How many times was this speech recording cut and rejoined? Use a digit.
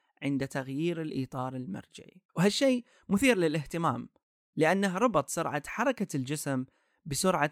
1